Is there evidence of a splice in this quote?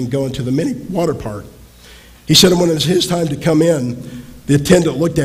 no; 0 cuts

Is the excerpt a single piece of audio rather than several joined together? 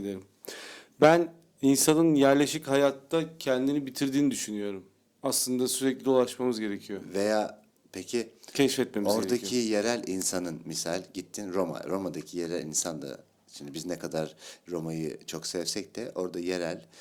yes; 0 cuts

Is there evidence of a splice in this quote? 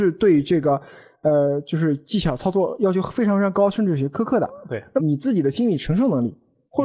yes; 1 cut; at 5.0 s

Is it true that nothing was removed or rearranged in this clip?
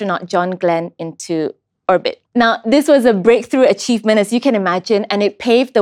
no; 1 cut; at 2.3 s

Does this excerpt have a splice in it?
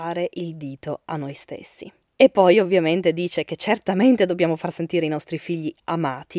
yes; 1 cut; at 2.1 s

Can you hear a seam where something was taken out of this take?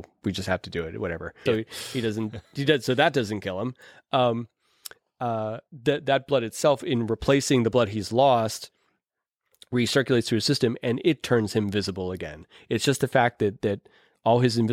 yes; 1 cut; at 1.5 s

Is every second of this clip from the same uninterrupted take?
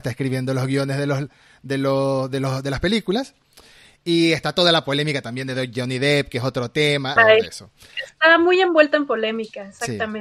no; 1 cut; at 7.2 s

